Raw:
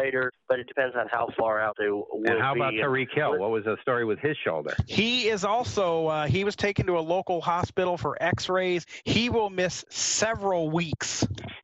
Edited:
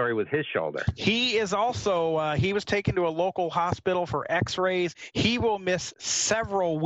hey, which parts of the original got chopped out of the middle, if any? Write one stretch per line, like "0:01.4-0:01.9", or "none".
none